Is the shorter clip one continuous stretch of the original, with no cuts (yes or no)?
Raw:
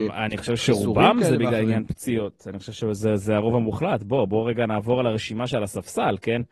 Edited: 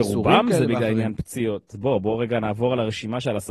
no